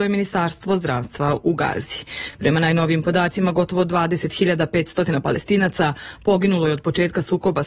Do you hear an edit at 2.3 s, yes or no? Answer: no